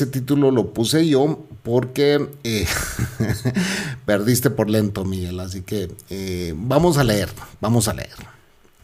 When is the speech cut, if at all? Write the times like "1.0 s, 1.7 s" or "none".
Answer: none

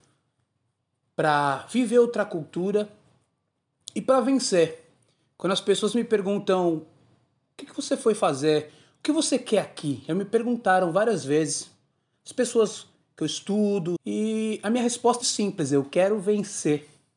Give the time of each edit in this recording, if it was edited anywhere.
14.0 s, 15.2 s

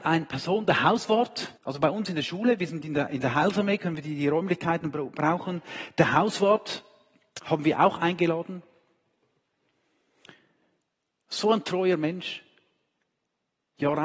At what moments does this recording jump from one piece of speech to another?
1.6 s

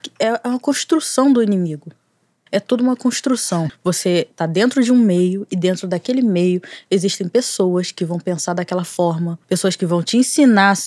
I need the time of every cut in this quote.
2.5 s, 3.7 s, 9.4 s

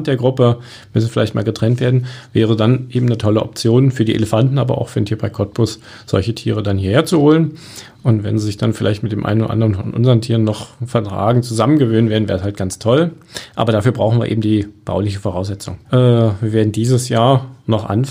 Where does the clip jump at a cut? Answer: 15.8 s

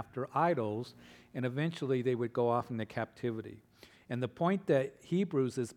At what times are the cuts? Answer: none

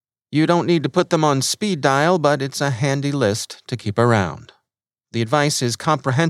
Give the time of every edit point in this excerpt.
5.0 s

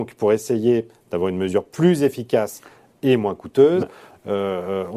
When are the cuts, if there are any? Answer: 3.8 s

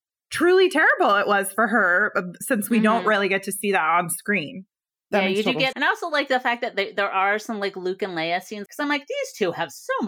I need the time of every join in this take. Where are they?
5.7 s, 8.7 s

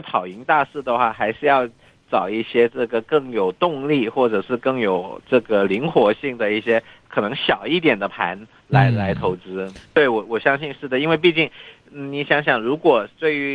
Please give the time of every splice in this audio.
9.8 s

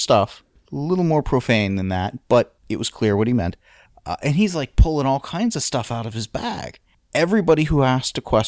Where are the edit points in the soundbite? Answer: none

